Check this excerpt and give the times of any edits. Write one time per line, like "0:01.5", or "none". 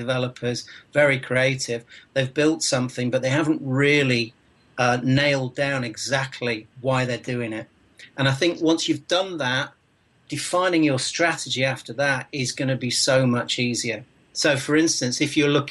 0:06.7